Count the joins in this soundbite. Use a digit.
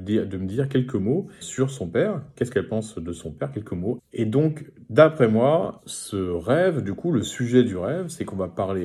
3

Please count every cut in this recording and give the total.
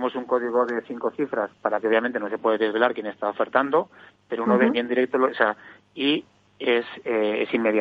2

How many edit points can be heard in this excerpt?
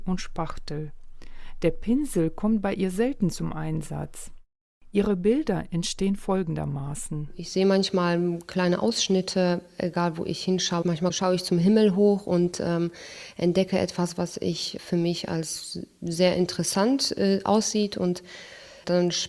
1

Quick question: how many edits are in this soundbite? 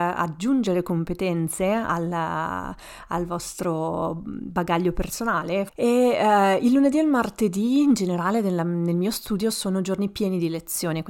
1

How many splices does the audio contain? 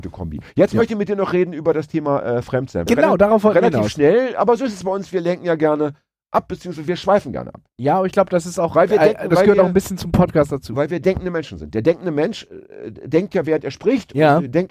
1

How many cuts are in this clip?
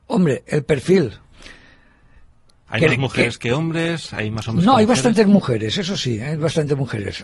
0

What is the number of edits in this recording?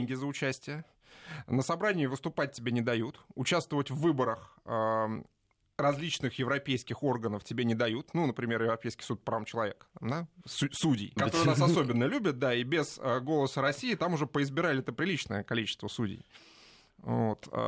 1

